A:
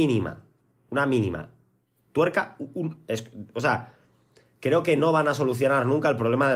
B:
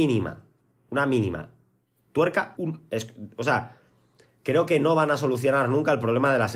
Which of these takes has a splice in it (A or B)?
B